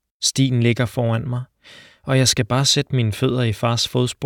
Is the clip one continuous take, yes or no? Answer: yes